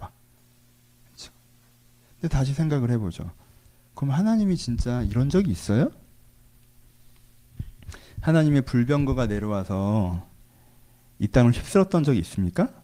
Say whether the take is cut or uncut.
uncut